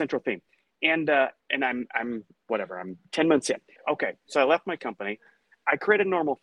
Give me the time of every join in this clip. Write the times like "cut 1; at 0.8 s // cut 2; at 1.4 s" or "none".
cut 1; at 1.4 s // cut 2; at 3.8 s